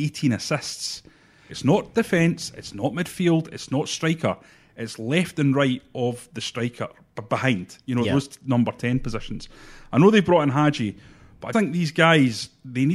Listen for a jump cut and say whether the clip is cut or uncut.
cut